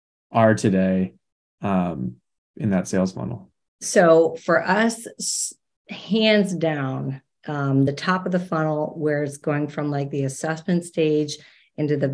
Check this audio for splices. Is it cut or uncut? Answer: uncut